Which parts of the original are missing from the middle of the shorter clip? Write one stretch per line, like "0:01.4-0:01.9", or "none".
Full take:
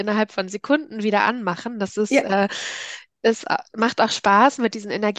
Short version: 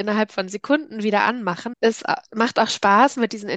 0:01.7-0:03.1

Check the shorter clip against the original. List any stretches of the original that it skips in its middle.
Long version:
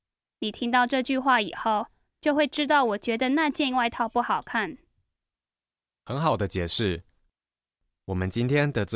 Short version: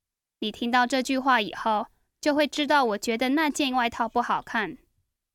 none

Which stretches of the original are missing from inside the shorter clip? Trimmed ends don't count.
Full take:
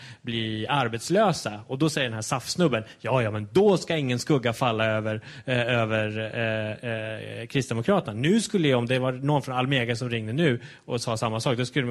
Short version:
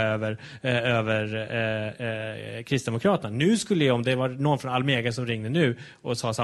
none

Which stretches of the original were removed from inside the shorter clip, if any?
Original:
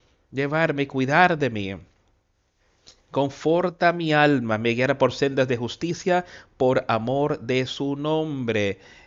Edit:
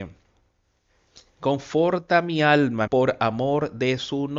0:04.6-0:06.5

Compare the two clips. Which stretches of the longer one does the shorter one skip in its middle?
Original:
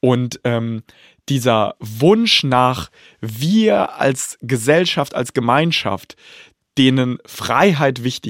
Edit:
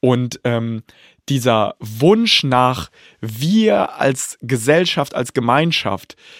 none

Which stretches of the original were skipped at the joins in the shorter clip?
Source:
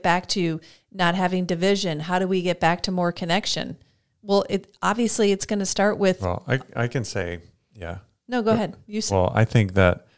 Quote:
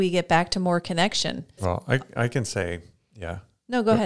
0:03.9-0:06.2

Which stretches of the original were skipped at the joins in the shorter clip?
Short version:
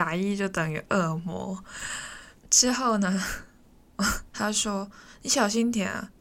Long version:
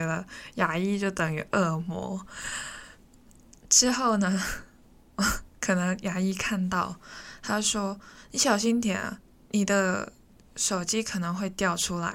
0:03.0-0:03.6
0:05.5-0:07.4

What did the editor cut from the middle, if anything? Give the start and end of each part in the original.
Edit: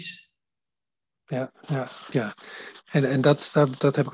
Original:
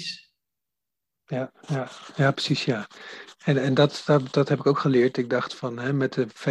0:02.1-0:02.6

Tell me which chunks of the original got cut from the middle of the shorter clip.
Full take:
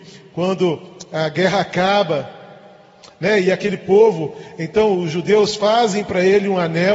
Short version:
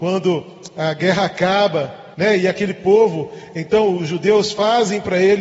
0:02.5-0:03.2

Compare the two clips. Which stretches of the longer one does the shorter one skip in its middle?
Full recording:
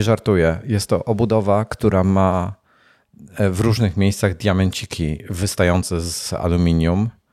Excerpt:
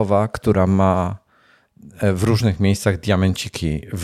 none

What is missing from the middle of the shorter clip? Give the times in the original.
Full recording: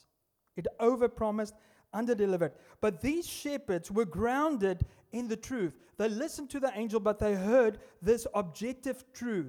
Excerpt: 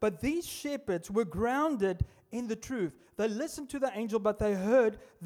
none

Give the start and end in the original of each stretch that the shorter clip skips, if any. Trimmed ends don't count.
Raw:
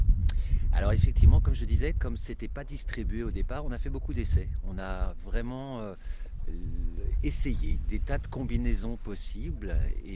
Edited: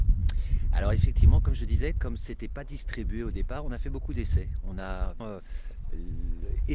0:05.2-0:05.8

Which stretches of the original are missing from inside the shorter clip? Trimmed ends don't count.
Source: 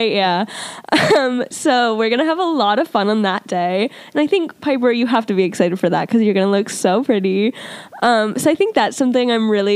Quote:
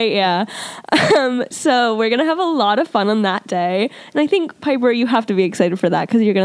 none

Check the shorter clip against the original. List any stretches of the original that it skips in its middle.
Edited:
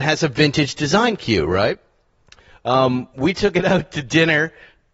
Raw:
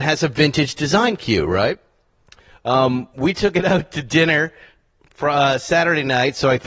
none

